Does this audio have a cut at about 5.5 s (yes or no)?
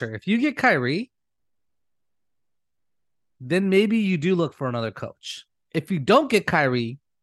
no